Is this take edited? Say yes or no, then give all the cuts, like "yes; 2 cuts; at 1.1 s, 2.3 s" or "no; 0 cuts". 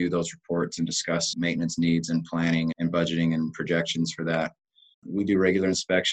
yes; 1 cut; at 4.9 s